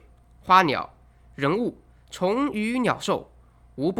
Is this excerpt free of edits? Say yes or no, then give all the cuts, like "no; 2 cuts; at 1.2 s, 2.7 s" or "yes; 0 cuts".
yes; 0 cuts